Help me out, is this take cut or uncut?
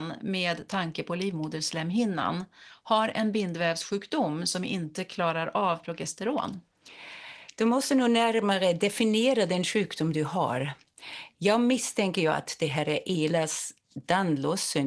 uncut